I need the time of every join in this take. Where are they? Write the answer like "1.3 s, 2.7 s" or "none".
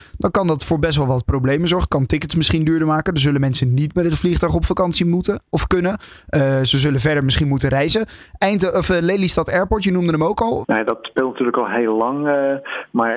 10.6 s